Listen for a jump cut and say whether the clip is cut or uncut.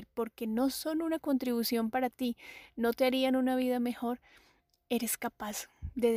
uncut